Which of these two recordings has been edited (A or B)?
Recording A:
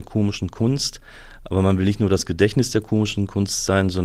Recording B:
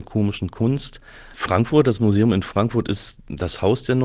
B